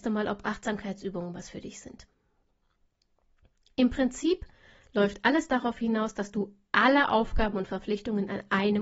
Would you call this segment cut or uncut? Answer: uncut